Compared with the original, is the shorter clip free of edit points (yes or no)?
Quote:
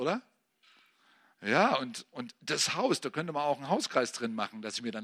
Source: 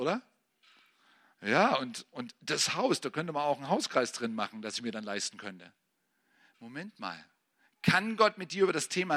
yes